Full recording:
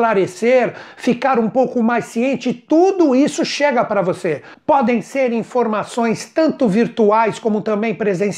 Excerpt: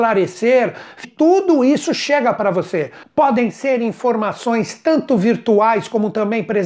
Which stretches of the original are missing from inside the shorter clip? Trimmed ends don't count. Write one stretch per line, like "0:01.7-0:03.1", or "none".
0:01.0-0:02.5